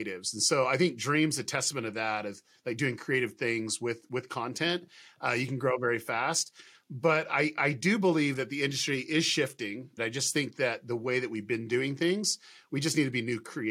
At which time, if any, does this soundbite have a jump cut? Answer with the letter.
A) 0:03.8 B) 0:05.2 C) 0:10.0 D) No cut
C